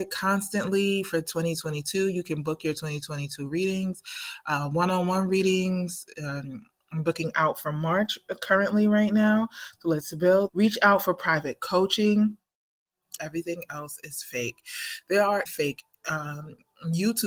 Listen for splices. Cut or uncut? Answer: cut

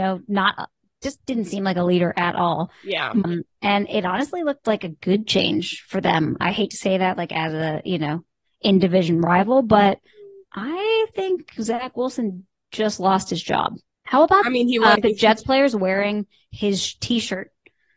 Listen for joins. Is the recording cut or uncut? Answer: cut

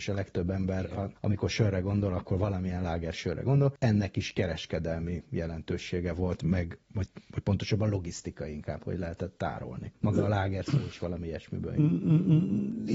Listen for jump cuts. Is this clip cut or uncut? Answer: uncut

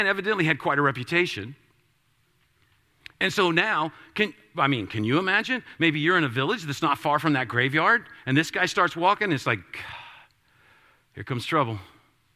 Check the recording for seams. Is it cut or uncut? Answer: uncut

